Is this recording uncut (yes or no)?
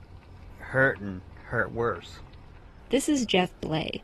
yes